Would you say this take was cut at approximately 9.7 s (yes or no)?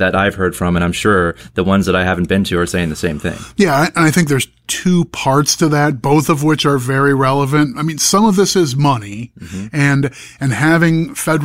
no